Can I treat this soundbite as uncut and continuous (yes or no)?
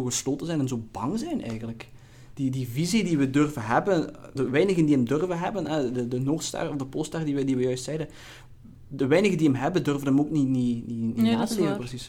no